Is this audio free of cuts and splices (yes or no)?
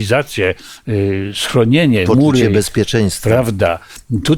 yes